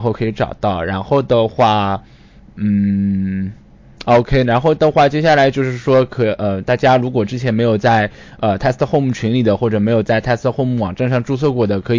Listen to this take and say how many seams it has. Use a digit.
0